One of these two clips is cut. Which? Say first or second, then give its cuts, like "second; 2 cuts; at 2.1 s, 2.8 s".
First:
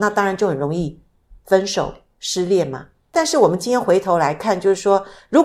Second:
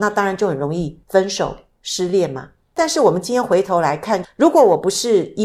second; 2 cuts; at 1.0 s, 4.2 s